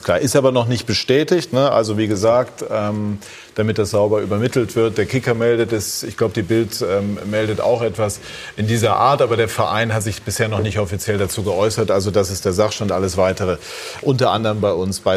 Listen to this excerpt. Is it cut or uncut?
cut